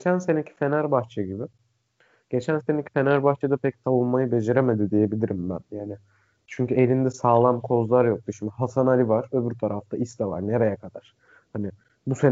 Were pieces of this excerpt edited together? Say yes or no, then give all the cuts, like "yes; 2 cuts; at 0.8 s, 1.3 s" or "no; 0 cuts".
no; 0 cuts